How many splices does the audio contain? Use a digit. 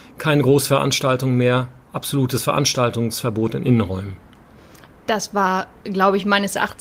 0